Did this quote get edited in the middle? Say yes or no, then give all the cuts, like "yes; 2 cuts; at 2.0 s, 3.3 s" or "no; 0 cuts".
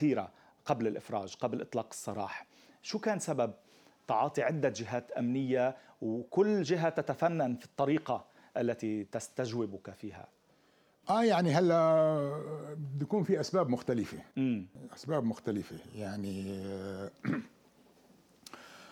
no; 0 cuts